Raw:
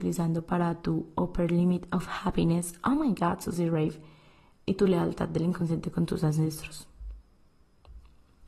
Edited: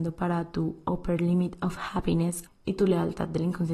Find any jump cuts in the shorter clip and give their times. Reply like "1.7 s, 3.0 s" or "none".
2.5 s